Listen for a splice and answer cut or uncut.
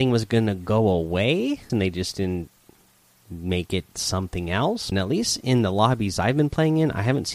cut